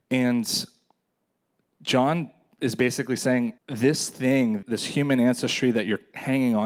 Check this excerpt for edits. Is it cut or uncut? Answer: cut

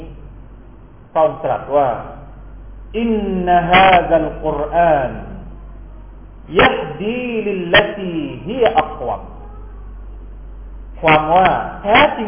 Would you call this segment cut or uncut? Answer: uncut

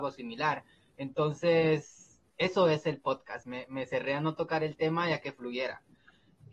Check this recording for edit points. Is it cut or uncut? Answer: cut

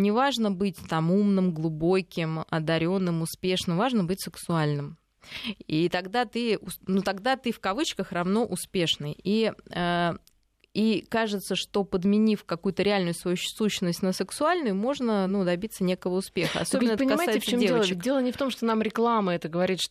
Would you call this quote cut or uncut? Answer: uncut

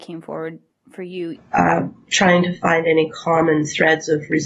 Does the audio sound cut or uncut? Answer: cut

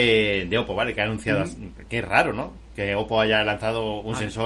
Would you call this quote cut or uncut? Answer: uncut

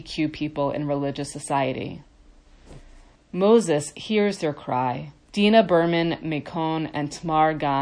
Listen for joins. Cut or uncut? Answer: cut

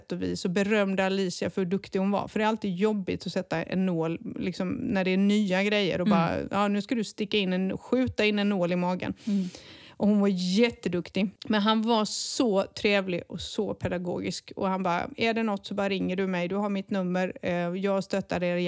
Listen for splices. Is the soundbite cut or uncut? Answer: cut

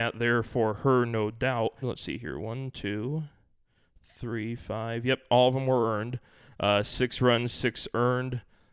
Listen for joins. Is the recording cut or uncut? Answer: cut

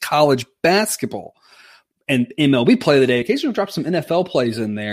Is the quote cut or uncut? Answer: uncut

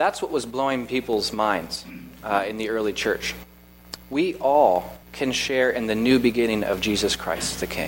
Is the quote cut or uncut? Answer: cut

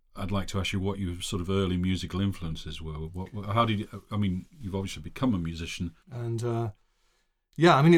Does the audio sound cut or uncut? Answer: cut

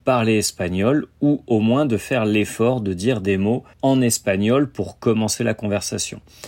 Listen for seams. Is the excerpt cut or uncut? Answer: cut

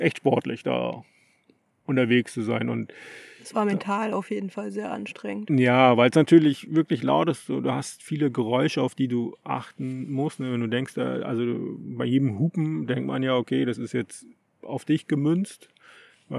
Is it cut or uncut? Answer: uncut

